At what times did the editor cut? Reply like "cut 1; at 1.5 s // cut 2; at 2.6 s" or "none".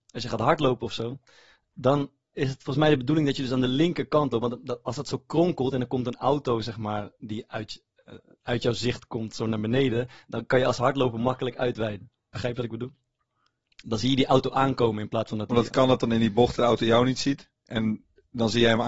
none